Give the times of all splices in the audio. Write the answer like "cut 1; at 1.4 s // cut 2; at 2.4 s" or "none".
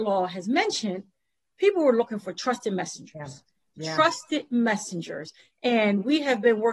none